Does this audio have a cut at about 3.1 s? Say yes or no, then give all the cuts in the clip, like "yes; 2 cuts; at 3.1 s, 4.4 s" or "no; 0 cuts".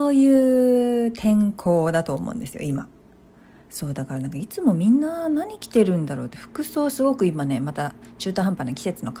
no; 0 cuts